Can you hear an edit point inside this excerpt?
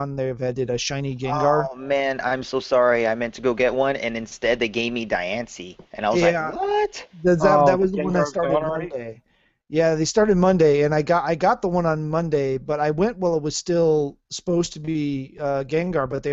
no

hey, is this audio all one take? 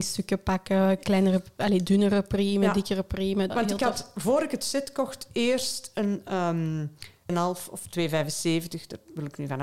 no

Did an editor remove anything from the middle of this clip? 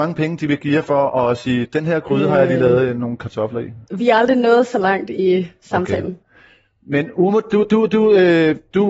no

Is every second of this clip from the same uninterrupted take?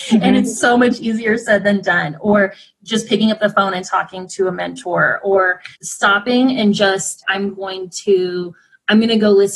no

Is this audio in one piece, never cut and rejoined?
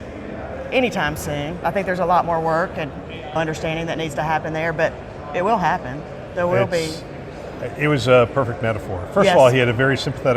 yes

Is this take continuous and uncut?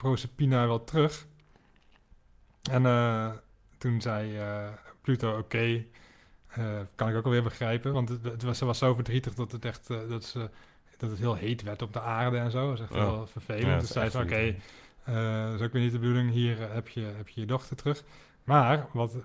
yes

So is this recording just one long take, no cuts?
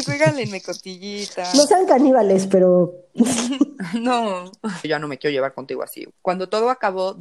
no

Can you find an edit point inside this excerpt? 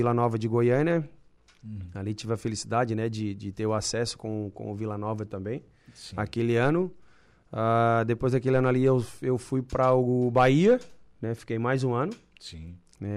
no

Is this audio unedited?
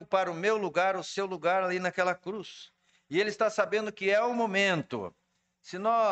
yes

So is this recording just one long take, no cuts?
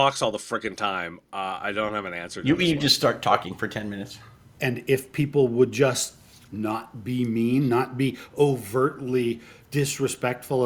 no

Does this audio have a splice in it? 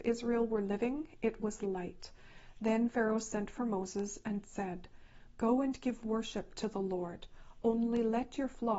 no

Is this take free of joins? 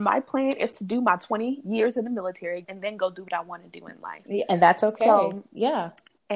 no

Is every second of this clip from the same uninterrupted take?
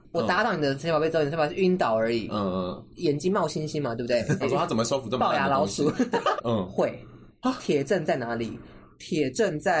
no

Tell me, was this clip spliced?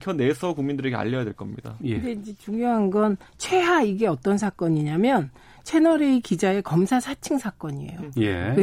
no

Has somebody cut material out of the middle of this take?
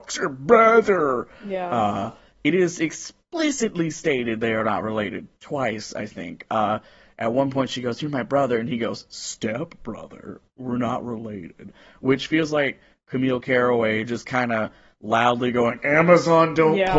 no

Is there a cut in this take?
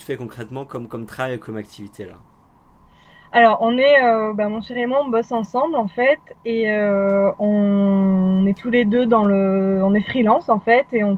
no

